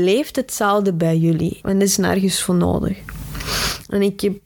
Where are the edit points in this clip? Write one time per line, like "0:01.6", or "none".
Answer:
0:01.6